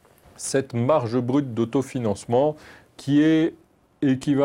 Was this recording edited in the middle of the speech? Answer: no; 0 cuts

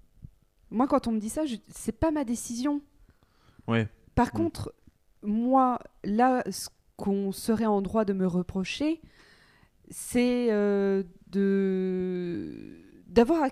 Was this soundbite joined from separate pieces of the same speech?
no; 0 cuts

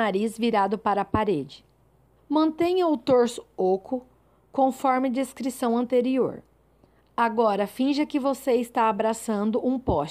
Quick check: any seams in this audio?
yes; 1 cut; at 2.2 s

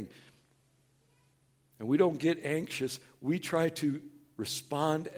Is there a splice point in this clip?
no; 0 cuts

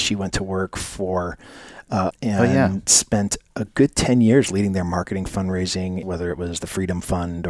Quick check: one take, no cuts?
no; 2 cuts; at 2.1 s, 6.0 s

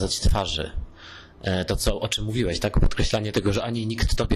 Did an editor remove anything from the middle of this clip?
no; 0 cuts

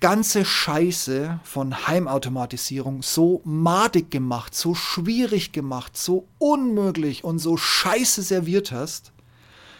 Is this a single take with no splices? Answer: yes; 0 cuts

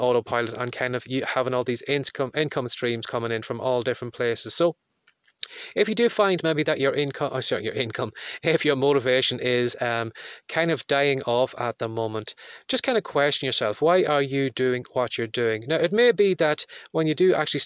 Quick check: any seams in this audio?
no; 0 cuts

